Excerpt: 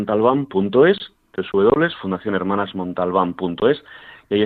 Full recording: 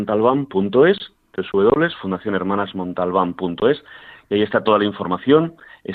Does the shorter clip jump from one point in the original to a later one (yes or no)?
no